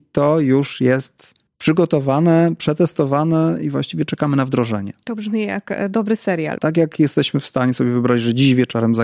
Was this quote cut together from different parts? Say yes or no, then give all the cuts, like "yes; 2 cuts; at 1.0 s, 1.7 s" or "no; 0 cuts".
yes; 2 cuts; at 1.5 s, 6.6 s